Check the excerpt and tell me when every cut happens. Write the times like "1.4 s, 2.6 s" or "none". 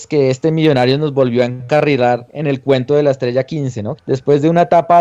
4.0 s